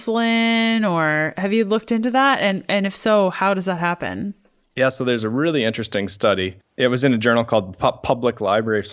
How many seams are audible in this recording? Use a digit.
0